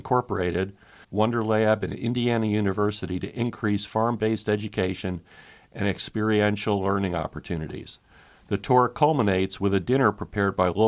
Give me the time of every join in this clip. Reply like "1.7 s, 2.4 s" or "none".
1.0 s